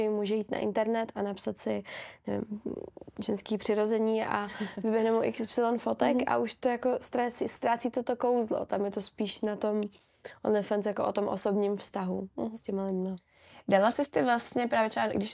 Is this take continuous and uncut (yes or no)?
no